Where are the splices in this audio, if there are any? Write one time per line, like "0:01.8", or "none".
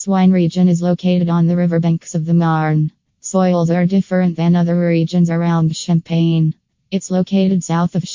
0:06.8